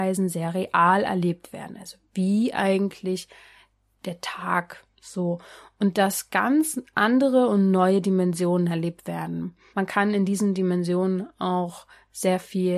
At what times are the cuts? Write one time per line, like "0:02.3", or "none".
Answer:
0:09.7